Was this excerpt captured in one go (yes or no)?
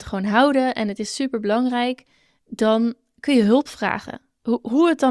yes